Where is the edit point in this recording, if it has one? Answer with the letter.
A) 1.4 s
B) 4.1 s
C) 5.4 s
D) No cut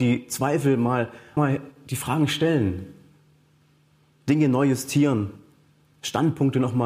A